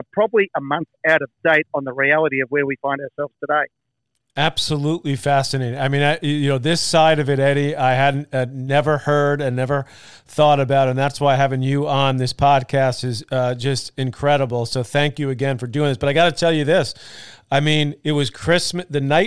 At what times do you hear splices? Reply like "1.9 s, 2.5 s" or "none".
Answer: none

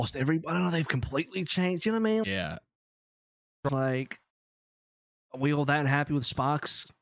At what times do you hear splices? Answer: 2.2 s, 3.7 s

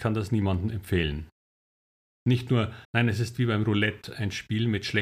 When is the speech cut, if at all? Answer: 2.8 s

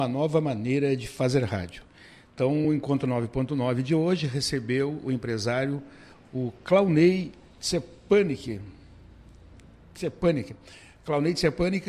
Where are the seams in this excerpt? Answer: none

